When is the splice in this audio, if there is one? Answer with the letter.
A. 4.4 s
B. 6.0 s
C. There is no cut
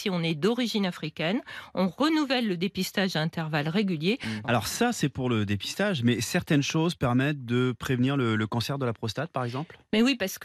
A